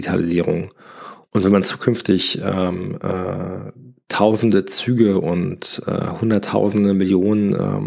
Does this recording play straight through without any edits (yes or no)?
no